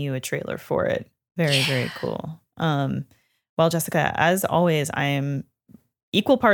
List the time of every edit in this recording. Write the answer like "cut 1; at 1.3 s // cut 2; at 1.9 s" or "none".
none